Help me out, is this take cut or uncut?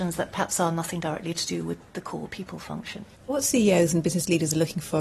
cut